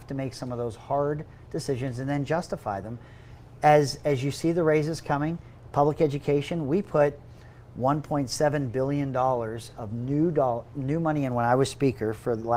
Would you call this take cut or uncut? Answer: uncut